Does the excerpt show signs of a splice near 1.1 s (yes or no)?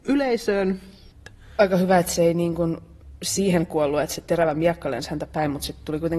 yes